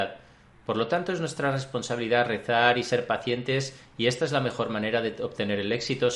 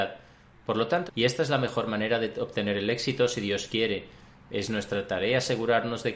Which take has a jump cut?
second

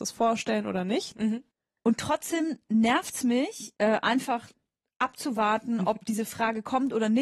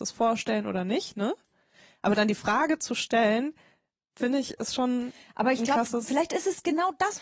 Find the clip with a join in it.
first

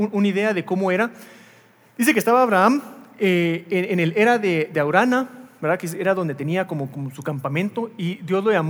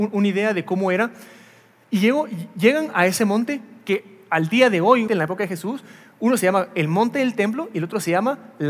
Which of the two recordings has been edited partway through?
second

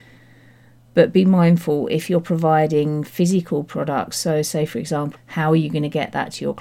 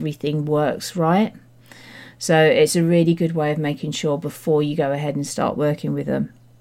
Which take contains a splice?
first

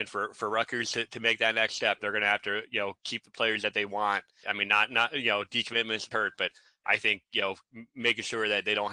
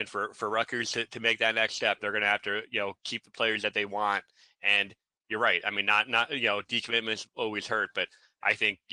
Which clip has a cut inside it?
first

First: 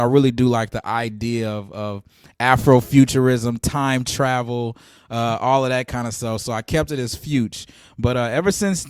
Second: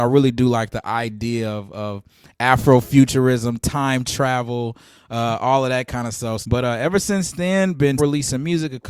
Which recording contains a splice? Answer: second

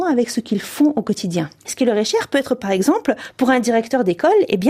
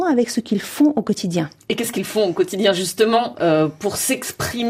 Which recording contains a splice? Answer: first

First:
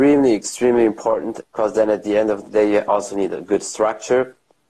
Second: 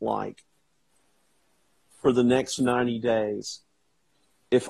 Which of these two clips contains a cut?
first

